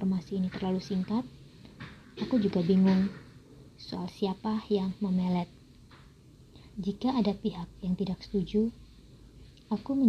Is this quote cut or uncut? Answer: cut